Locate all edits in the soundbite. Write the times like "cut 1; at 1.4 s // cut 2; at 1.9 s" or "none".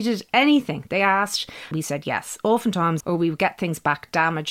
cut 1; at 1.7 s // cut 2; at 3.0 s